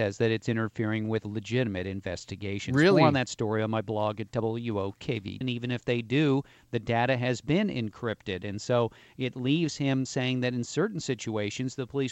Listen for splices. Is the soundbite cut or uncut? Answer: cut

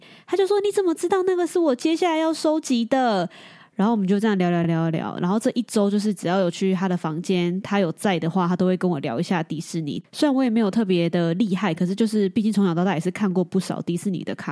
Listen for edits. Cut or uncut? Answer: uncut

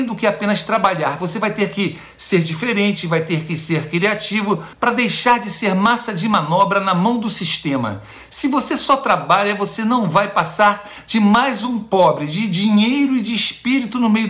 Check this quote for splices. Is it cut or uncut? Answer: uncut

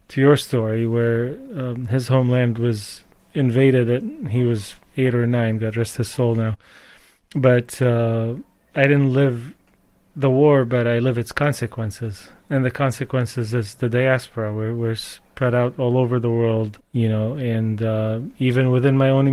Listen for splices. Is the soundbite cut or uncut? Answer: cut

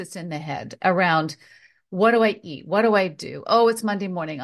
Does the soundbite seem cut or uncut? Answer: uncut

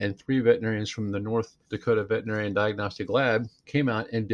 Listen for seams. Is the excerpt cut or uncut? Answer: cut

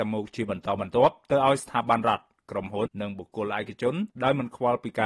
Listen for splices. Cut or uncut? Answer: cut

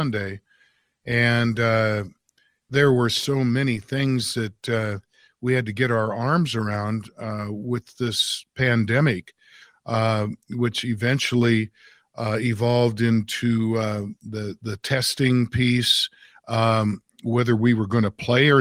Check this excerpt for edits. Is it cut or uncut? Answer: uncut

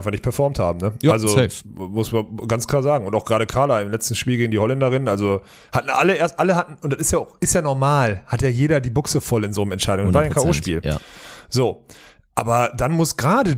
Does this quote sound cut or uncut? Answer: uncut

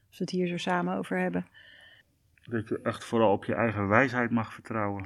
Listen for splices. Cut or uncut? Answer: uncut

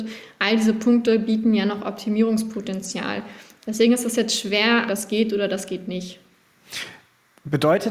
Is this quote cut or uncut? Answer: cut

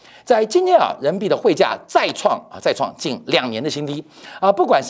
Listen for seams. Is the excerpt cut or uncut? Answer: uncut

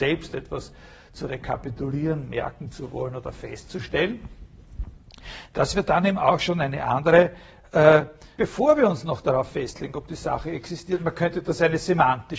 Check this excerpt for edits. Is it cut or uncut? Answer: cut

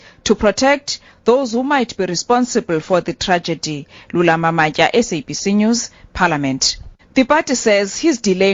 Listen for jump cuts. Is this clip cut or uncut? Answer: cut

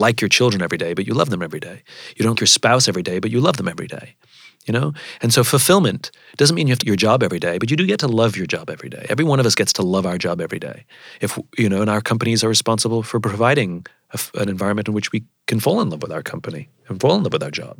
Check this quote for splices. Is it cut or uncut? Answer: cut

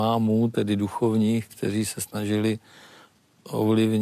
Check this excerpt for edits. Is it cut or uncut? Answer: uncut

